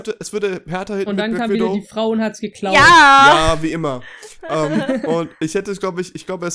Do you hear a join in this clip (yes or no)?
no